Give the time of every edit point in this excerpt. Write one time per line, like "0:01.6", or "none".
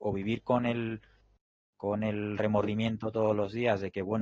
none